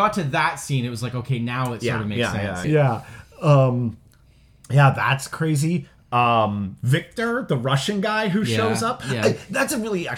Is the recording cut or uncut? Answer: cut